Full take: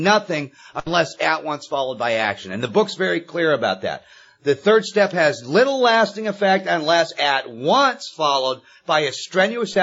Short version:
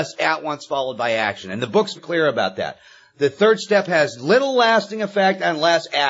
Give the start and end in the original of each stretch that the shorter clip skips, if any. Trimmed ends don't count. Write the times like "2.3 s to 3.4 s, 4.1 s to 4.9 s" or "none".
3.0 s to 3.2 s